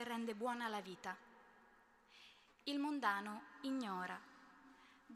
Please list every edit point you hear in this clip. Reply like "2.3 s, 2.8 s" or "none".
none